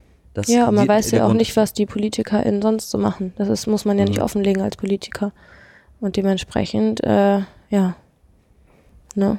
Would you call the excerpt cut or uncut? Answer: uncut